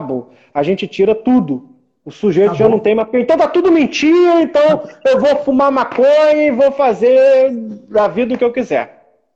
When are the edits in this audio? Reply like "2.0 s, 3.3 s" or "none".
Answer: none